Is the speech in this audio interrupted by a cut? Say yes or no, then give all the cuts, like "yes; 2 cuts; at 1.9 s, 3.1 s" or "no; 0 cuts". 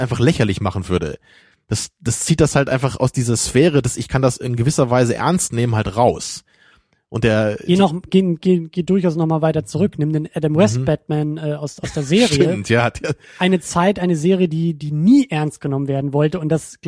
no; 0 cuts